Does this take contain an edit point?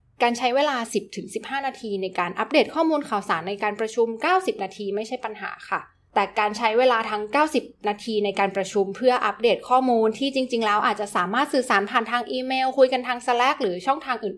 no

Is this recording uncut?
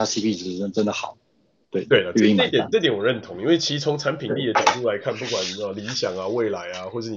yes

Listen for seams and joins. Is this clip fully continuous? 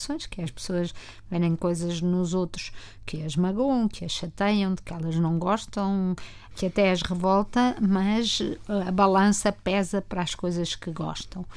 yes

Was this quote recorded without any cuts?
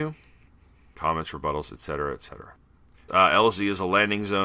no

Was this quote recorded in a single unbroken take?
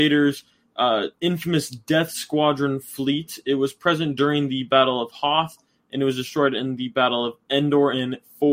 yes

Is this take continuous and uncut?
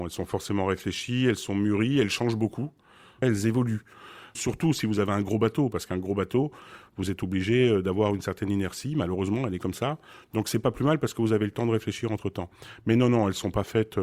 yes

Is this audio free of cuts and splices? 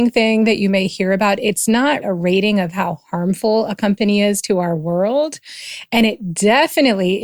no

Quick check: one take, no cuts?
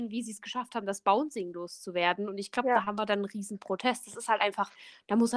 yes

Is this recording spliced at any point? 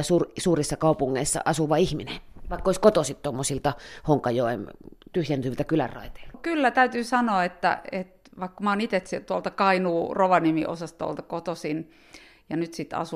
no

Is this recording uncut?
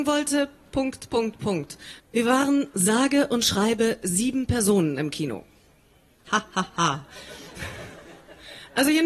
no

